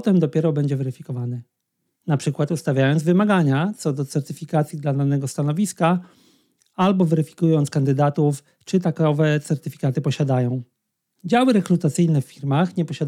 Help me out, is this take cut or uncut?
cut